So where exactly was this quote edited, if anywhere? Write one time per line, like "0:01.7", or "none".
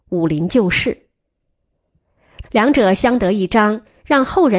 0:02.4